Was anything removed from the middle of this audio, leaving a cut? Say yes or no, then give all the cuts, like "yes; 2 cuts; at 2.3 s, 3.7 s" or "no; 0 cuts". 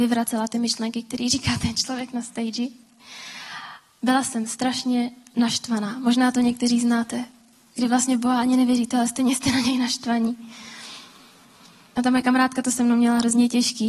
no; 0 cuts